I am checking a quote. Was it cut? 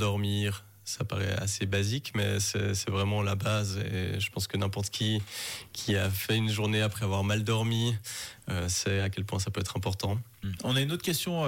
yes; 1 cut; at 10.6 s

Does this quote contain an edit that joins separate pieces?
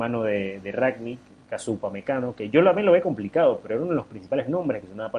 no; 0 cuts

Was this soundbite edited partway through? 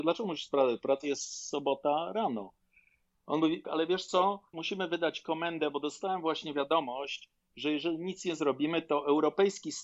yes; 1 cut; at 3.6 s

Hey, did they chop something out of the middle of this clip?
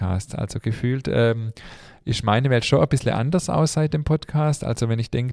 no; 0 cuts

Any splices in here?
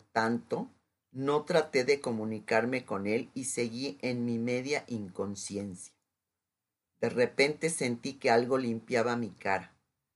yes; 1 cut; at 6.9 s

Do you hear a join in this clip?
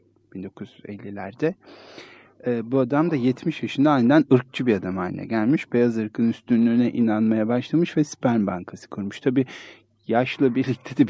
no; 0 cuts

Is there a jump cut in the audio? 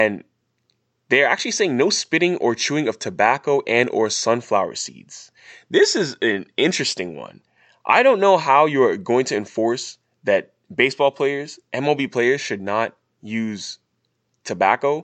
no; 0 cuts

